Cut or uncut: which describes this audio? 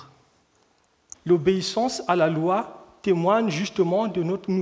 cut